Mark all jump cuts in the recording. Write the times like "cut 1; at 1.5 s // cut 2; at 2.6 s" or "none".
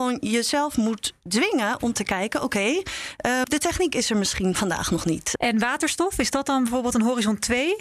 cut 1; at 3.4 s // cut 2; at 5.4 s